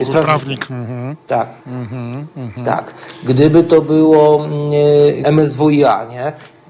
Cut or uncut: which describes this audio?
cut